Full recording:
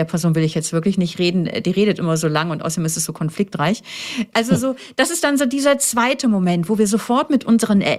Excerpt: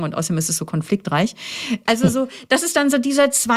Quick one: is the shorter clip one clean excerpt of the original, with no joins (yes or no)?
yes